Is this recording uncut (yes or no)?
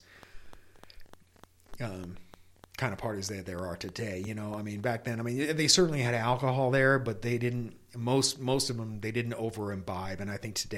yes